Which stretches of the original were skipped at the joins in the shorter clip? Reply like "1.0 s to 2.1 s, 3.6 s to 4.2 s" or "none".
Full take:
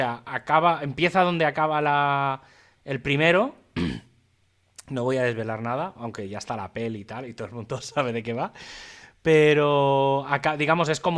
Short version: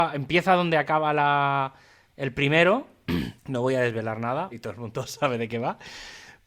4.1 s to 4.8 s, 5.9 s to 7.3 s